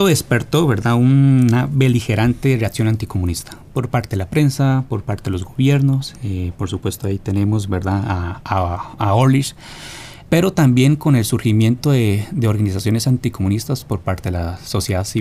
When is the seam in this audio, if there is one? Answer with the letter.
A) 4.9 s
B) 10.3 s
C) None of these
B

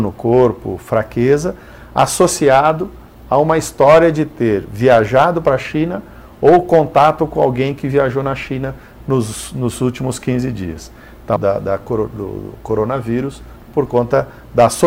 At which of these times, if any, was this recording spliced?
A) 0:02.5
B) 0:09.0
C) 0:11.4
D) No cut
C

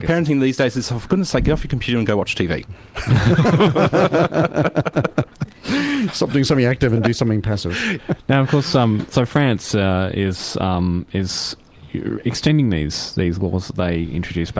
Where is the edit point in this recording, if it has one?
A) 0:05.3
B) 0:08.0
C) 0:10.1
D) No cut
B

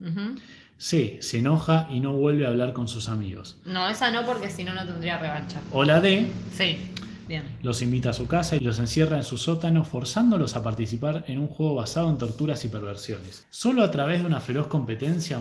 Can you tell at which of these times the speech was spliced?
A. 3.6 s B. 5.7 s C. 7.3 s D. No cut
C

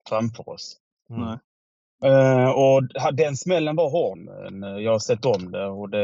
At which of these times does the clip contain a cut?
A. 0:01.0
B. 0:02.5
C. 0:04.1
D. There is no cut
C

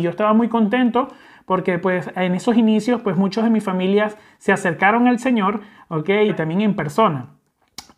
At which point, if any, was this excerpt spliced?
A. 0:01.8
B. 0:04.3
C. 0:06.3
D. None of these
C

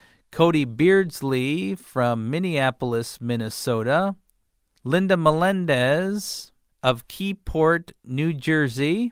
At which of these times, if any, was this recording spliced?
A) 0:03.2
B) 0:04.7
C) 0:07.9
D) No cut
D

